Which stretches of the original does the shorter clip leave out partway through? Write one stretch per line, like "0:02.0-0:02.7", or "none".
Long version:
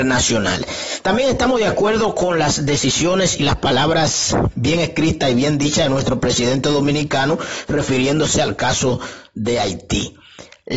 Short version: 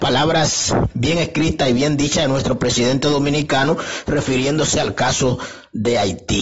none